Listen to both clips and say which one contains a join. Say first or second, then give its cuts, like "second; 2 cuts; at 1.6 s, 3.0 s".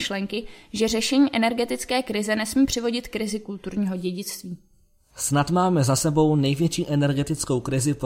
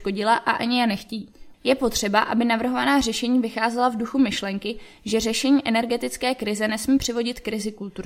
second; 1 cut; at 1.5 s